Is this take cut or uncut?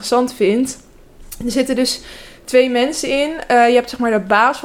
uncut